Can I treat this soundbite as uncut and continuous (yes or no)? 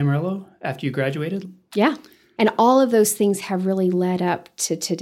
no